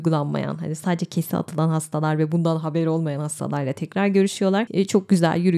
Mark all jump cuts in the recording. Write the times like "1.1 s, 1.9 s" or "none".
4.7 s